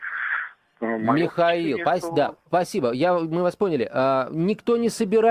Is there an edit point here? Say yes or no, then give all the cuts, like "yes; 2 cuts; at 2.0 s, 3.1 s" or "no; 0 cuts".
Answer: no; 0 cuts